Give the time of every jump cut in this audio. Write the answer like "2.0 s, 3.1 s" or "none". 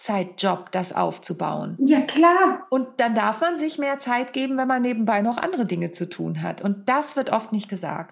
none